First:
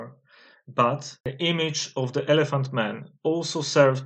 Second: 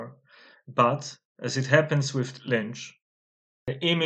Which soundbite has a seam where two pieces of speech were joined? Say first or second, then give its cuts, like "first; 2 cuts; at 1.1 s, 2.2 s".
first; 1 cut; at 1.2 s